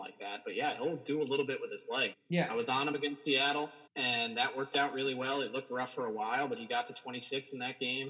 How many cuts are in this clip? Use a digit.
2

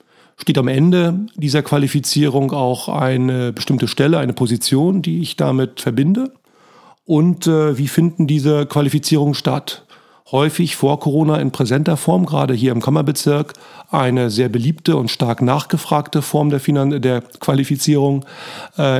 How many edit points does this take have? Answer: 1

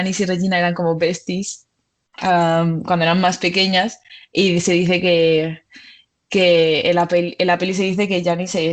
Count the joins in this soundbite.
0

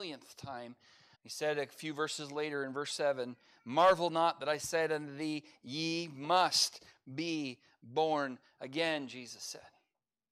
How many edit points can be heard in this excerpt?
1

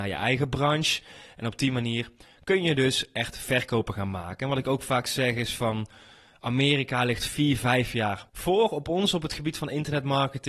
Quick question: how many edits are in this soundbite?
1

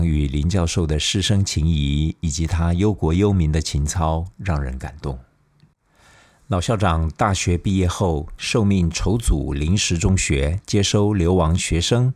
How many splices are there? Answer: 0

